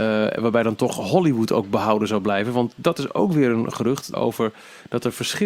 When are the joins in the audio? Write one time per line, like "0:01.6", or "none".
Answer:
0:04.1